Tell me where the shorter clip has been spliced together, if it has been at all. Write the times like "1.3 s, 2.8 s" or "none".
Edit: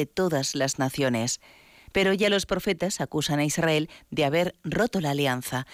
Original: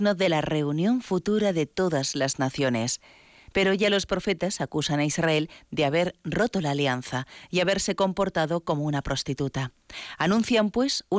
none